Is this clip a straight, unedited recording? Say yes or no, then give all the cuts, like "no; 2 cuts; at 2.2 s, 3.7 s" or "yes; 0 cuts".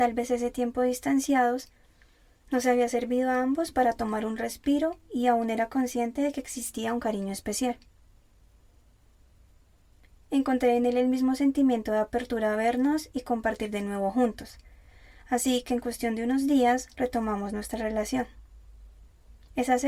yes; 0 cuts